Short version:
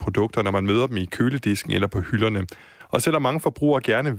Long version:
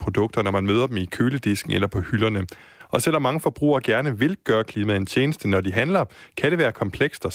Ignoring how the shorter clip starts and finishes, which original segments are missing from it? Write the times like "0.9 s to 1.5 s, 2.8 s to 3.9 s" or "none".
none